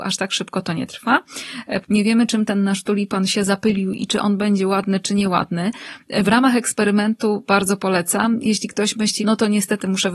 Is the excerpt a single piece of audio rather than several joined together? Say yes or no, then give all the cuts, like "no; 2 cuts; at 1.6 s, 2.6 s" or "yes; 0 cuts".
no; 2 cuts; at 1.8 s, 9.2 s